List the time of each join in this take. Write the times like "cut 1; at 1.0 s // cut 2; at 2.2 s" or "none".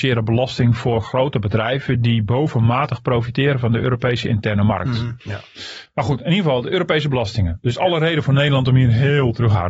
cut 1; at 5.2 s